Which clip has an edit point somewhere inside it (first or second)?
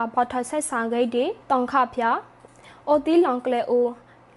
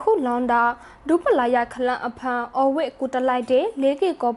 first